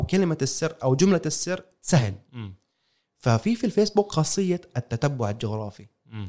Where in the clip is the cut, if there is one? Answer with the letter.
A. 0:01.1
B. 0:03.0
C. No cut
C